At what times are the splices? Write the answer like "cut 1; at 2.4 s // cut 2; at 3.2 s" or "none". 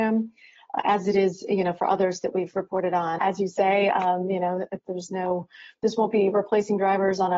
cut 1; at 3.2 s